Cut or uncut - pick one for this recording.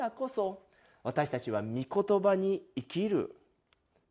uncut